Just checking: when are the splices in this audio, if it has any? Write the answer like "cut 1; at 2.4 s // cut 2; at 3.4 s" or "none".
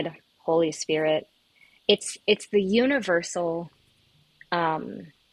none